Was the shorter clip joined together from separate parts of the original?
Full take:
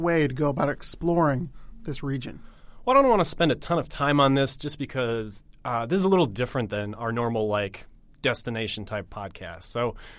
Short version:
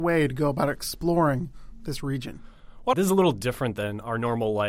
yes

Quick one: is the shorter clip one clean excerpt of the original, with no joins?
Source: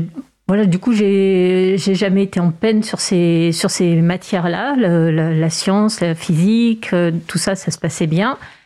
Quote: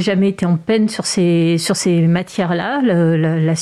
yes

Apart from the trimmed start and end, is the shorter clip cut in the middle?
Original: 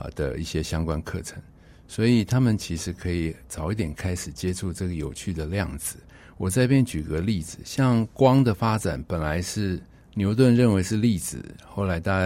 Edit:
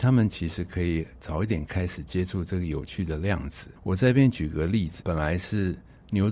yes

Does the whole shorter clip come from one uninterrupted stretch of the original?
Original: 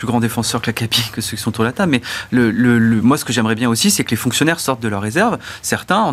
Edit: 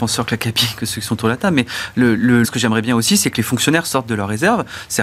no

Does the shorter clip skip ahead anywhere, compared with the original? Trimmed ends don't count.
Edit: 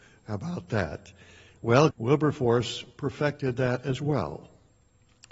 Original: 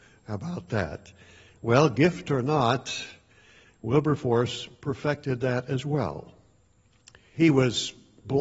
yes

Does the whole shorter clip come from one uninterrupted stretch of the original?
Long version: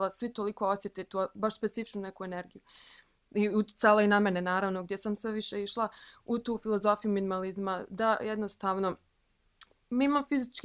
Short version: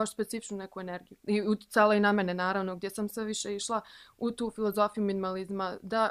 no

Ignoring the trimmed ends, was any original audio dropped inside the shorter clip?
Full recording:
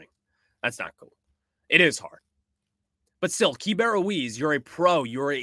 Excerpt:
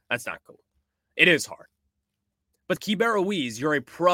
yes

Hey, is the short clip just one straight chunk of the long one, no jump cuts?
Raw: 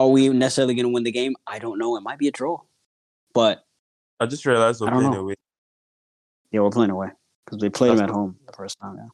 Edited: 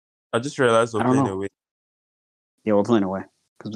yes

